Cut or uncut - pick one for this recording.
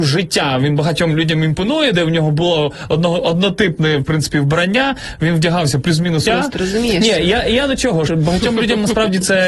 cut